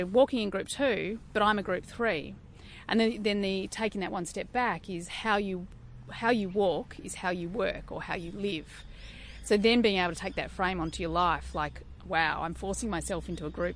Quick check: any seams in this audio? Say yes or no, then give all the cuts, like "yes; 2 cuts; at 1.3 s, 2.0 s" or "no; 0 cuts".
no; 0 cuts